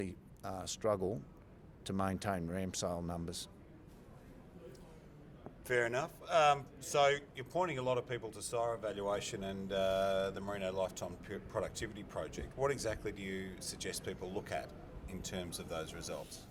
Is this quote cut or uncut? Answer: uncut